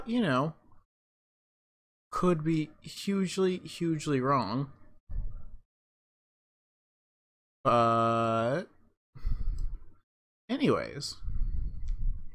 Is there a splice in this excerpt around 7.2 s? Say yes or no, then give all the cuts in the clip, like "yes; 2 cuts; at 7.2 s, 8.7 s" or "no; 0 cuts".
no; 0 cuts